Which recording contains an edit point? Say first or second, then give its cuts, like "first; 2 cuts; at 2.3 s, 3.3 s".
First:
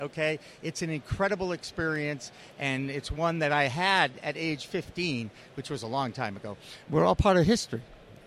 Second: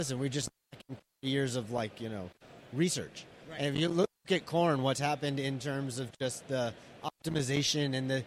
first; 1 cut; at 6.8 s